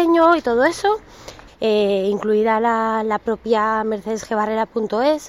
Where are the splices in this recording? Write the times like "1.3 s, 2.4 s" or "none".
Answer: 1.5 s